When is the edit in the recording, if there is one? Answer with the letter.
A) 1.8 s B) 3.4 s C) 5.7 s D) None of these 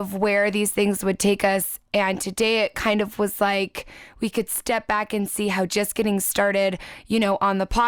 D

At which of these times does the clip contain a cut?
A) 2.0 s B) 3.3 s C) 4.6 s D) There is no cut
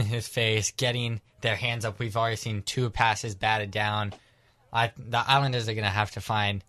D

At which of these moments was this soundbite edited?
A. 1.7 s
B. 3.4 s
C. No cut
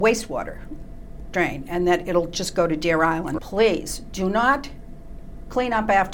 B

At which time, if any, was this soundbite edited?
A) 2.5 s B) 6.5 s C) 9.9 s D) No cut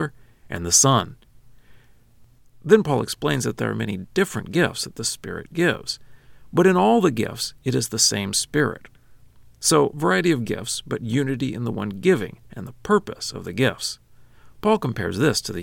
D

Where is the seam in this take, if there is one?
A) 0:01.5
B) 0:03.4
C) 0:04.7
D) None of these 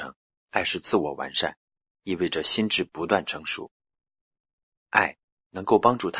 D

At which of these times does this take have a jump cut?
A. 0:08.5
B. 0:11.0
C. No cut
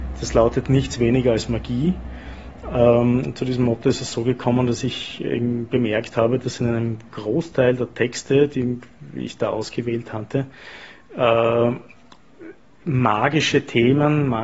C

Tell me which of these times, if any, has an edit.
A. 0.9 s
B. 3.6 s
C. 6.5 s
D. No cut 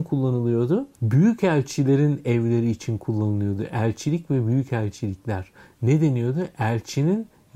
A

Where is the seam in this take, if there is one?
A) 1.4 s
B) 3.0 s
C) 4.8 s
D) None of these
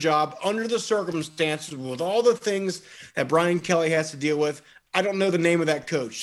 D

